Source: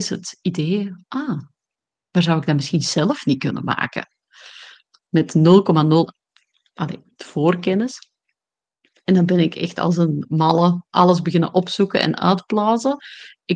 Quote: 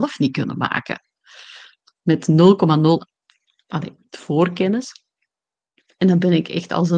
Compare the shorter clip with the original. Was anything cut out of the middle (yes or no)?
no